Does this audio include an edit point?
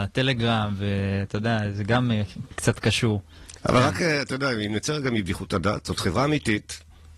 no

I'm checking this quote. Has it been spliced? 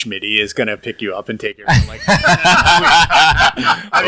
no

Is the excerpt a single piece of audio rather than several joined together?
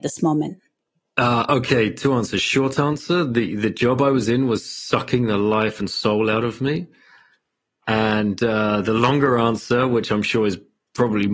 yes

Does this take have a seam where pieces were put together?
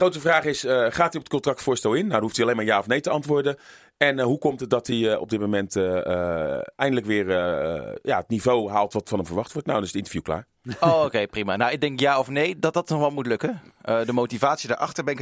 no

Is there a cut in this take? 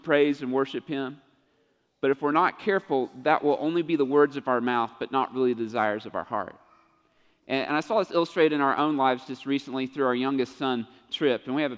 no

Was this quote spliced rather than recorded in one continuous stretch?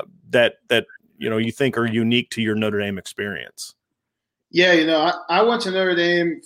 no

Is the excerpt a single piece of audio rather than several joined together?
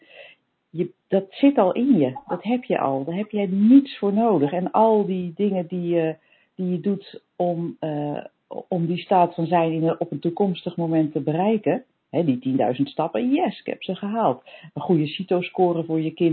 yes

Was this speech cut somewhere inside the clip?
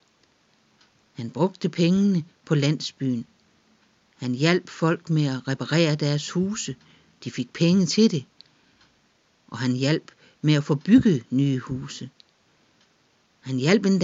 no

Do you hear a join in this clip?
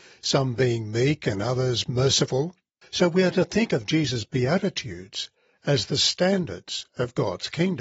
yes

